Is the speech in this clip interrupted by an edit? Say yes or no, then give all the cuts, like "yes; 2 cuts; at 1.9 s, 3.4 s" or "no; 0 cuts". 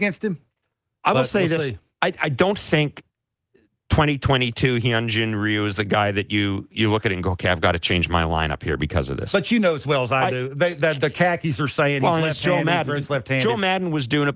no; 0 cuts